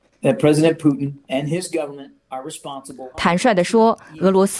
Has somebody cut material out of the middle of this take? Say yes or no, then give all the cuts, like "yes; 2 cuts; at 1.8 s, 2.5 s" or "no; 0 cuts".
yes; 1 cut; at 3.1 s